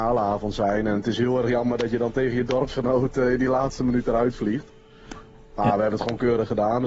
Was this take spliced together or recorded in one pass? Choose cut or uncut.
uncut